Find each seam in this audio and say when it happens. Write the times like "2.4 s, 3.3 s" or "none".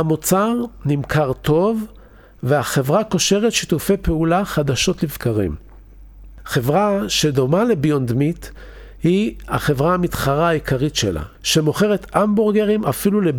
11.3 s